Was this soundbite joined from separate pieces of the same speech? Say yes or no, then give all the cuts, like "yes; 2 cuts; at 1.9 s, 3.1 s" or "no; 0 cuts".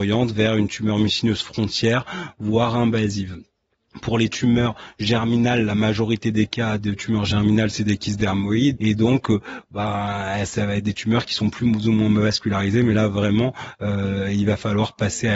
yes; 1 cut; at 8.8 s